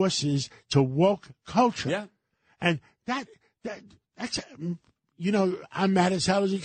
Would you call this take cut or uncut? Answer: uncut